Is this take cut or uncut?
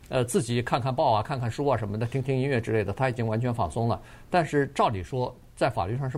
uncut